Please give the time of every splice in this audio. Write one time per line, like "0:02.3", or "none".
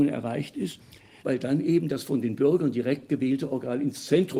0:01.2